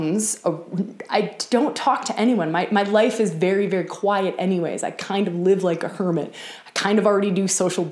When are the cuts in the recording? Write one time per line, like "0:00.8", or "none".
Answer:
none

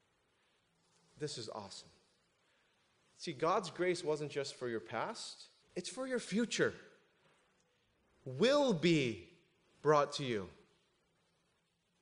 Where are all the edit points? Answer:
0:05.6

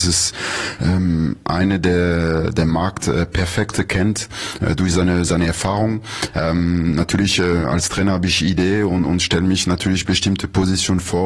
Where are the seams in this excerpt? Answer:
none

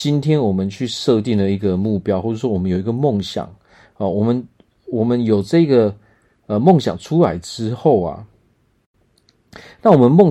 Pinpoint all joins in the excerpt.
none

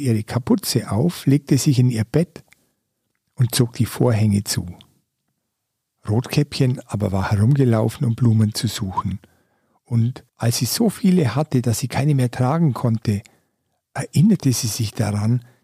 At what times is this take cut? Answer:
none

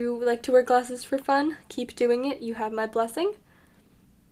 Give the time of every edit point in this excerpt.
none

